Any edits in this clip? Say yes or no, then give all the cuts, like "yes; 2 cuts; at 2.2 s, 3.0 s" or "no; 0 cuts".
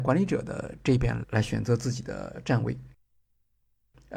yes; 1 cut; at 1.2 s